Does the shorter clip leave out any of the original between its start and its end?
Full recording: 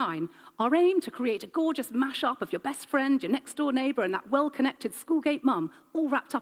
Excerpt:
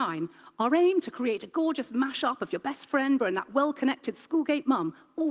yes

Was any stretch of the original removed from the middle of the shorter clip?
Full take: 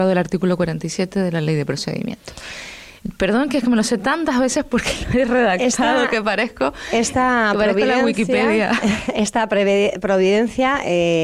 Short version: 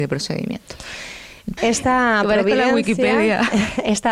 yes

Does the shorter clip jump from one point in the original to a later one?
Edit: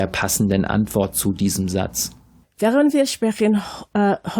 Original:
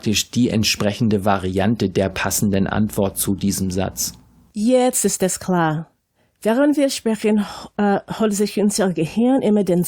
yes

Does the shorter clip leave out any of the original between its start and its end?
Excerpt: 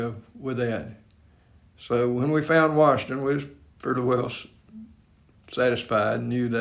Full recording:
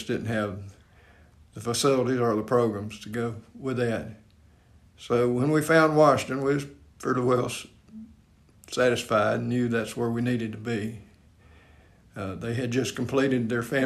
no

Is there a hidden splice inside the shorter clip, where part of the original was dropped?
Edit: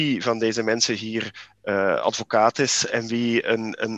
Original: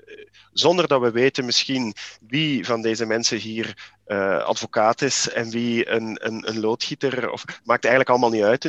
no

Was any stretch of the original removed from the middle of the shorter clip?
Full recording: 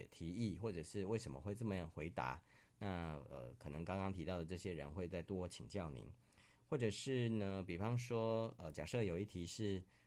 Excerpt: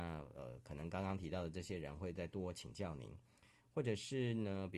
no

